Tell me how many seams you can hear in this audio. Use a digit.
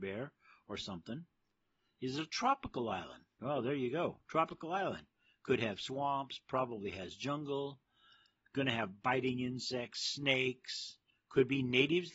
0